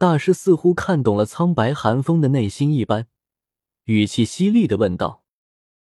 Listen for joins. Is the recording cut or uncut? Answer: uncut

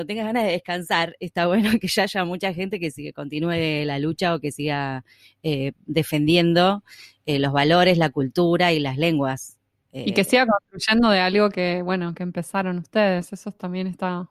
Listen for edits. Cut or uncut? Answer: uncut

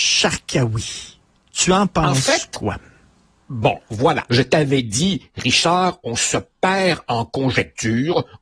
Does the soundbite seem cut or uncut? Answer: cut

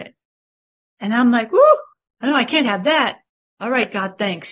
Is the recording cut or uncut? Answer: uncut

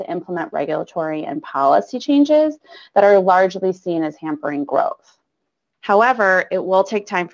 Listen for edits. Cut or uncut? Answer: cut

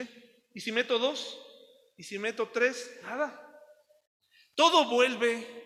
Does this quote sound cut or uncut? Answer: uncut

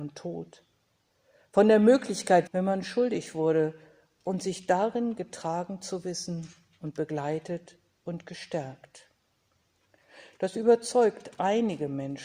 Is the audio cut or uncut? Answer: cut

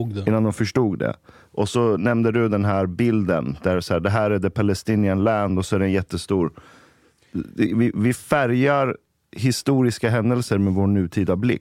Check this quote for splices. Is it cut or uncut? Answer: uncut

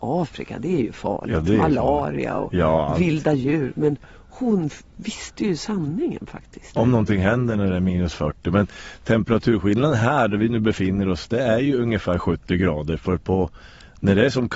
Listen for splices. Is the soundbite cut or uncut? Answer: cut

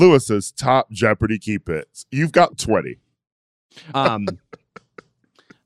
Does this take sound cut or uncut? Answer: cut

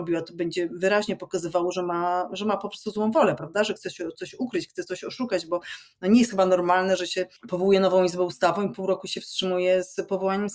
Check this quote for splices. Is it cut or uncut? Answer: cut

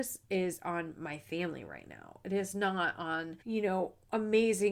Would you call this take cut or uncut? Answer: cut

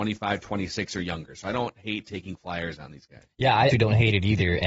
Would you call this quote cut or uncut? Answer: cut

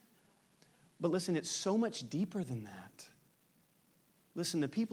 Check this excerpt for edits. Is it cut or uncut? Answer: uncut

